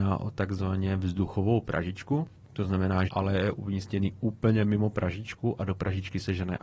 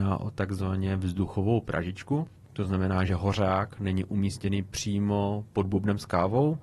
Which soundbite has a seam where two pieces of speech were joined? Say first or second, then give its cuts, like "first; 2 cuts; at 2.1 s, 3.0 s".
first; 1 cut; at 3.1 s